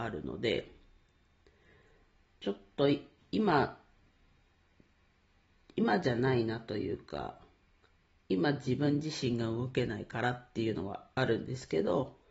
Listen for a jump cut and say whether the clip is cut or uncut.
uncut